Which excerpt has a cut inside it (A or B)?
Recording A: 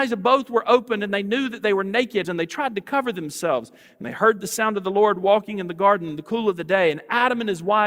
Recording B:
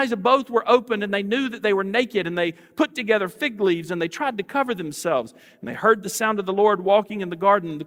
A